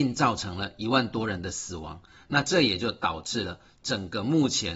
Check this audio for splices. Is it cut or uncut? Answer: uncut